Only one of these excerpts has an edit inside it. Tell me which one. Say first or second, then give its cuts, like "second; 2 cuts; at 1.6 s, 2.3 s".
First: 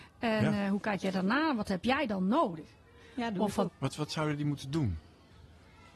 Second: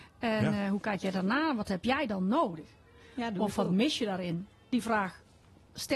first; 1 cut; at 3.6 s